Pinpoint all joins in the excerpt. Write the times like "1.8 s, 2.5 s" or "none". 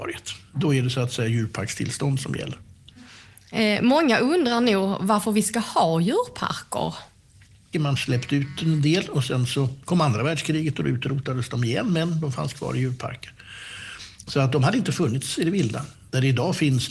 7.7 s